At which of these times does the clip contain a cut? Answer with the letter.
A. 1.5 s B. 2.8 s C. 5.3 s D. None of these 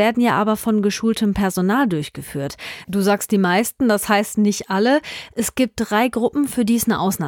B